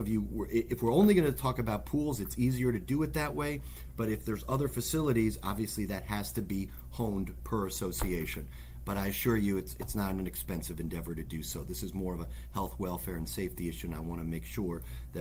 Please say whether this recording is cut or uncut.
uncut